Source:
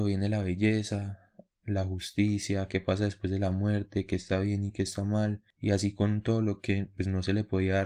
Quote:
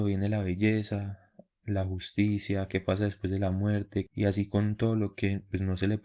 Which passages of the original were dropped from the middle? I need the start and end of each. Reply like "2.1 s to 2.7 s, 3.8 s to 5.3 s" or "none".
4.1 s to 5.5 s